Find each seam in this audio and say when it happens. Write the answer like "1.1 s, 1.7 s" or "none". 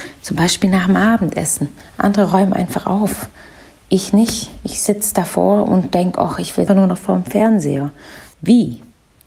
6.7 s, 8.3 s